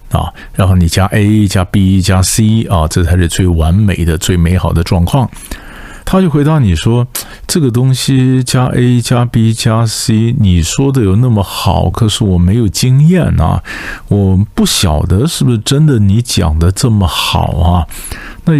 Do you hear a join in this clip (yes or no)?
yes